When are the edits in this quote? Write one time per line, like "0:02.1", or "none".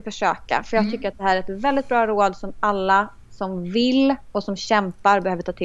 none